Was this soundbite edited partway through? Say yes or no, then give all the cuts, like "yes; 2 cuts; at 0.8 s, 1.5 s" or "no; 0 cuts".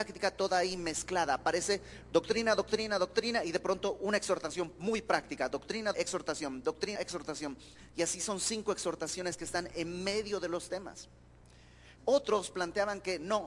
yes; 3 cuts; at 5.9 s, 7.0 s, 12.0 s